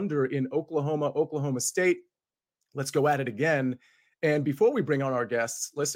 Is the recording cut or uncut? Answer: uncut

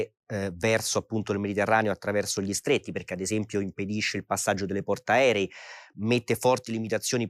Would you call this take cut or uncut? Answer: uncut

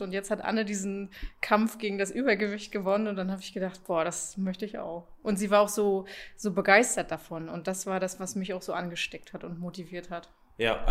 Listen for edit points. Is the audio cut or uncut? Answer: uncut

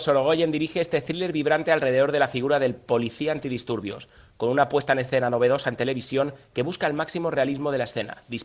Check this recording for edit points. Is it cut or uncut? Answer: uncut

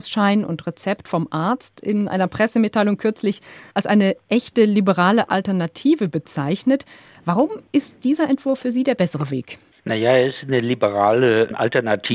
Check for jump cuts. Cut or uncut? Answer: uncut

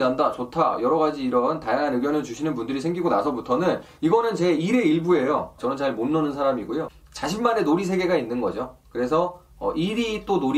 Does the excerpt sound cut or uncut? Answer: cut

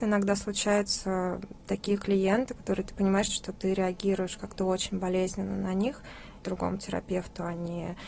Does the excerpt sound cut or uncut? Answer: cut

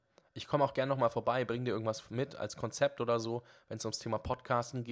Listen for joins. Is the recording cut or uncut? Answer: uncut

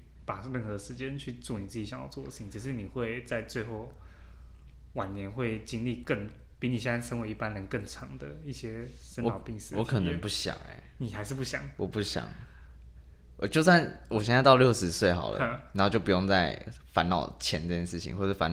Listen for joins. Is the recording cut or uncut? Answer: uncut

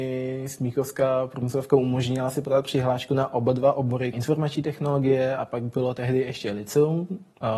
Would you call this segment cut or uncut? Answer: cut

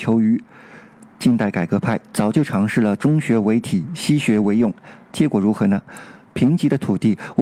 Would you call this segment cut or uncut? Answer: uncut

